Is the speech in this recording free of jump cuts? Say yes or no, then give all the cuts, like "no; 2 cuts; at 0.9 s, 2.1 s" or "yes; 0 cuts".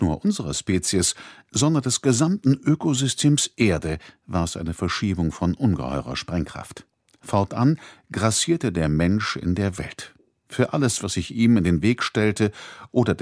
yes; 0 cuts